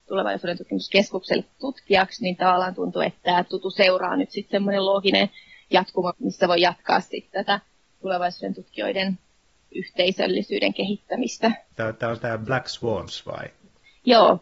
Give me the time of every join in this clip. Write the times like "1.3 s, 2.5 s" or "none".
6.1 s, 11.7 s